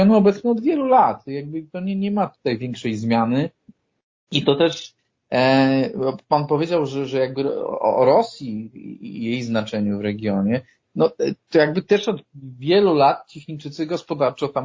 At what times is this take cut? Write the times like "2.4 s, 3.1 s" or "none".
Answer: none